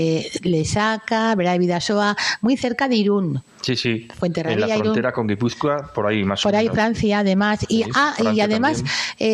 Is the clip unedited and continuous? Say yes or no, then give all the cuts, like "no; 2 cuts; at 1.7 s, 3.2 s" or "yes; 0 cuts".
yes; 0 cuts